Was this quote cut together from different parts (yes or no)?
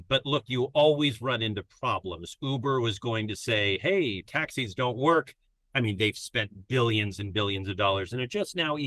no